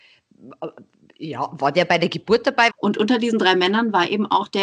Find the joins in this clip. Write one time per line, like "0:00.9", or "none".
0:02.7

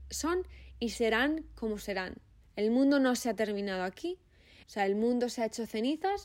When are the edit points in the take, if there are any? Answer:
0:02.4
0:04.6

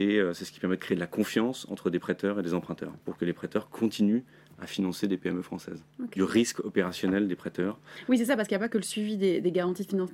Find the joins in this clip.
0:03.0
0:06.2

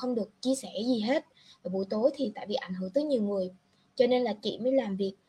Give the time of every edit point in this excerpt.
none

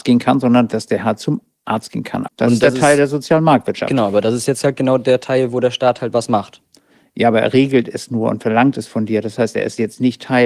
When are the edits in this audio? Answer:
0:02.3

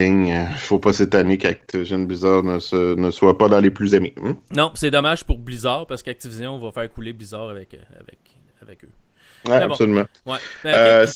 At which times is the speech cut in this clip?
none

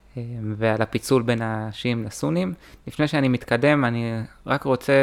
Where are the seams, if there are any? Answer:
none

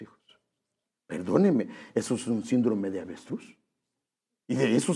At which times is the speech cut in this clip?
none

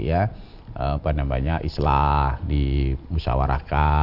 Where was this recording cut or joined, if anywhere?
0:01.0

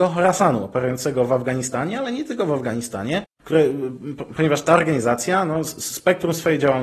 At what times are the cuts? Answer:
none

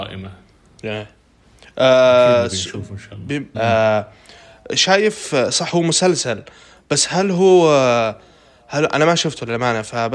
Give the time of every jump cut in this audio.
0:03.5

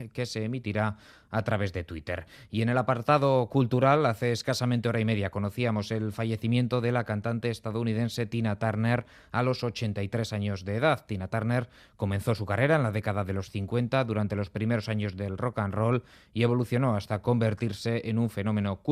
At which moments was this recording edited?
none

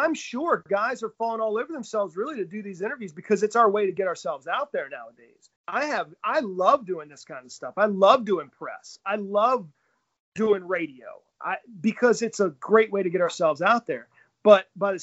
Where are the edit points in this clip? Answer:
0:05.6

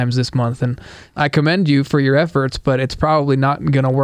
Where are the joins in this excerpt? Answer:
none

